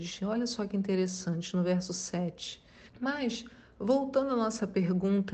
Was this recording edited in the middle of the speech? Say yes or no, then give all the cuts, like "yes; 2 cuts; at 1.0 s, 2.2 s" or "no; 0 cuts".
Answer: yes; 1 cut; at 2.9 s